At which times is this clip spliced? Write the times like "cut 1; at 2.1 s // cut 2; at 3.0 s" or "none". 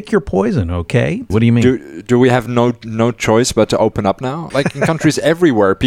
cut 1; at 1.3 s // cut 2; at 4.5 s